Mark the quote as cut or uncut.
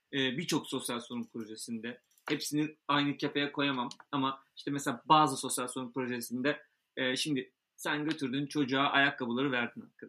uncut